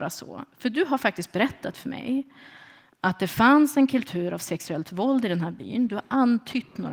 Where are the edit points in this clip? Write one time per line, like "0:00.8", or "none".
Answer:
none